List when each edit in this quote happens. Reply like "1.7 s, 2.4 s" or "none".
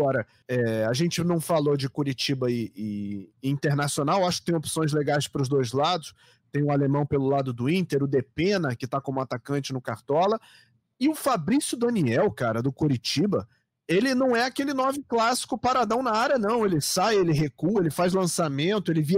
none